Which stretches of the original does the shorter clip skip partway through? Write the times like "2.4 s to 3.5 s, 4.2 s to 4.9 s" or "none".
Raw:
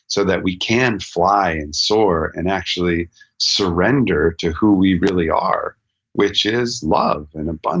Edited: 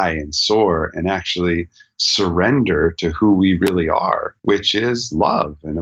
5.8 s to 6.1 s